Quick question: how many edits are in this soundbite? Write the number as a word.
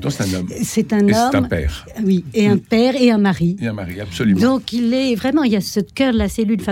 zero